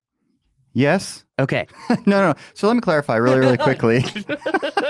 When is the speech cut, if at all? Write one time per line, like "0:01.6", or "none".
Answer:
none

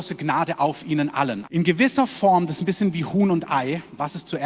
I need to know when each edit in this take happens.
0:01.4

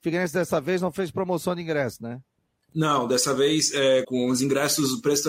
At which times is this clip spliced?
0:04.0

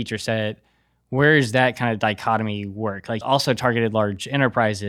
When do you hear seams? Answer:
0:03.2

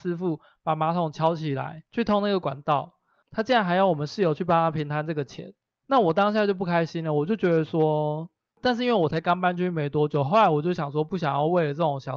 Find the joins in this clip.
0:03.2
0:08.5

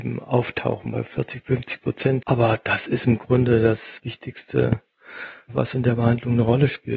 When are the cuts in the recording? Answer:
0:02.2
0:04.0

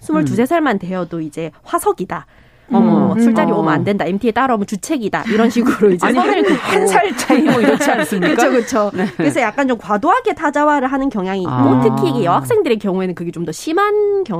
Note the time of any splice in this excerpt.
0:03.1

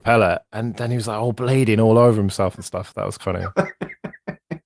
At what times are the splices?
0:03.2

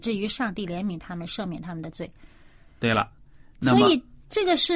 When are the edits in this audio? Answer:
none

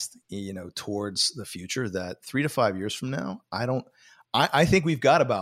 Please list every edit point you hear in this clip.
none

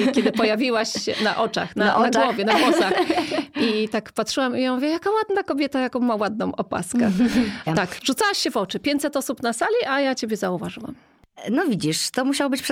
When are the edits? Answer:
0:07.7

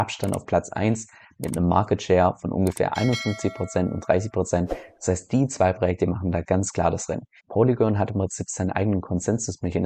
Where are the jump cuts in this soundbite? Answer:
0:07.4

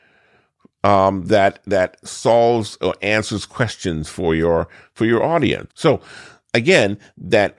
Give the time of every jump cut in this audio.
0:05.7

